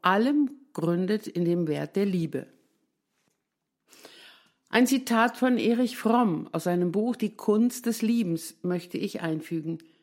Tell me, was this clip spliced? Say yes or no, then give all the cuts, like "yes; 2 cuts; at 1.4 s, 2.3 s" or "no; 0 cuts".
no; 0 cuts